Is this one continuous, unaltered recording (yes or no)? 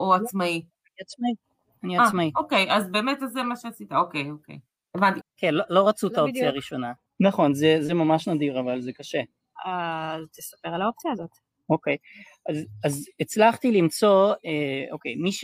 no